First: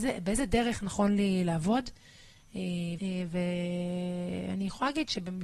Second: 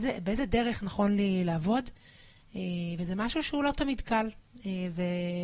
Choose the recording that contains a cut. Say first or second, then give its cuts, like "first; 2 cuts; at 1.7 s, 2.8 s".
first; 1 cut; at 3.0 s